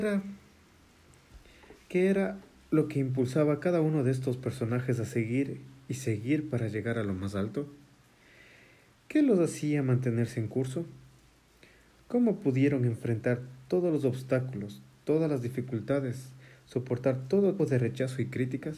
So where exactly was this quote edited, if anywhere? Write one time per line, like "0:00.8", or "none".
0:17.6